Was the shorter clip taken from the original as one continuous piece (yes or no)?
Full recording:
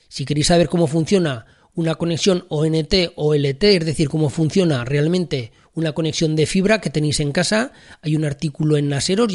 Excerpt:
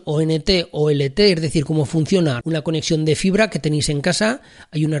no